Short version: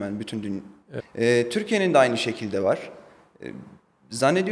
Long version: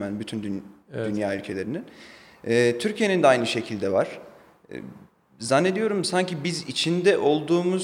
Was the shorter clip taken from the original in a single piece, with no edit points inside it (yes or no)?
no